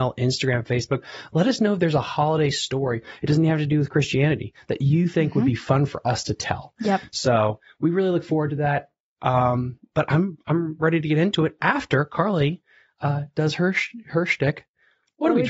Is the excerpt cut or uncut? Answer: uncut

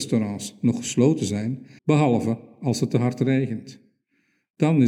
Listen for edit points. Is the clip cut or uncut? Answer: cut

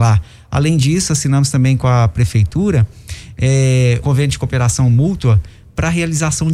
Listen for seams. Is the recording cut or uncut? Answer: cut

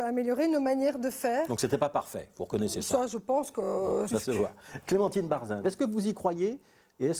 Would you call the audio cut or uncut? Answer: cut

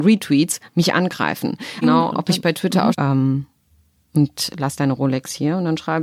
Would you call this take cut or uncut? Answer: cut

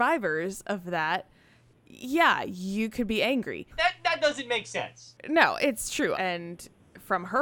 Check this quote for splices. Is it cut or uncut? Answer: cut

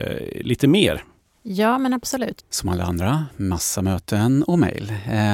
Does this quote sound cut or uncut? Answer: cut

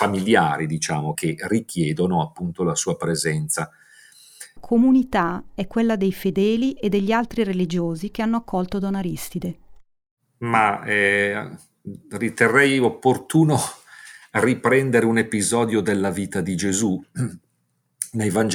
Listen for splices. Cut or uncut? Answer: cut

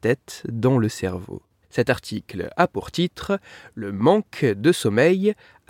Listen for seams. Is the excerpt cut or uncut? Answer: cut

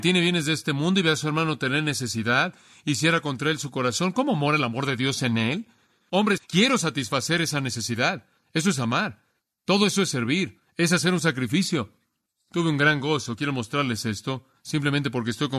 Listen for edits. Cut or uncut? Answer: cut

